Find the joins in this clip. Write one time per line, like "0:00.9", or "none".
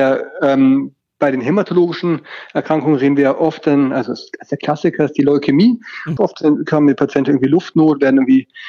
0:06.2